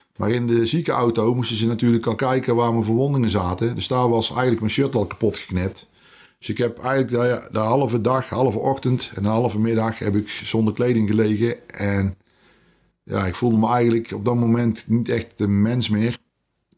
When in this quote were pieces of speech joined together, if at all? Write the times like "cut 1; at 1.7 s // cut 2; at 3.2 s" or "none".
none